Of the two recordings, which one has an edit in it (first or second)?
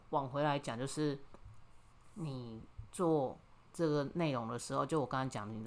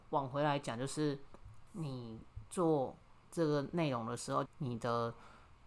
second